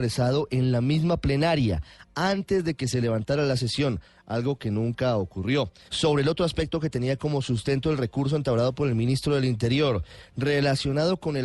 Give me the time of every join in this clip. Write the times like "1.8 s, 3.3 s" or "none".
5.9 s